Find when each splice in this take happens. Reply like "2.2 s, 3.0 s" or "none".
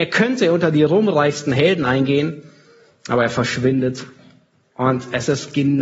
none

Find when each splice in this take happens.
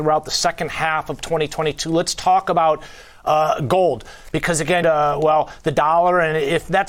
4.8 s

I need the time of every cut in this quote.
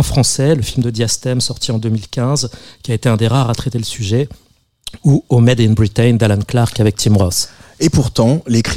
none

